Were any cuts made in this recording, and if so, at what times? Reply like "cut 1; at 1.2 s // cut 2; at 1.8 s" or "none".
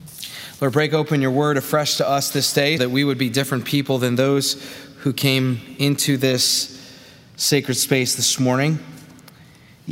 cut 1; at 2.8 s